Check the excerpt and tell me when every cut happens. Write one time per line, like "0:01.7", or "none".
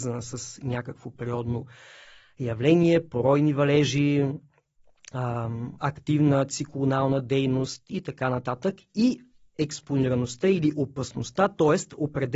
none